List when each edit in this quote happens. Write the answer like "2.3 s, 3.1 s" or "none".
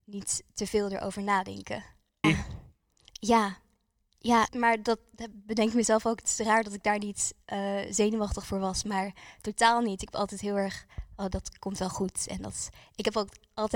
2.2 s, 4.5 s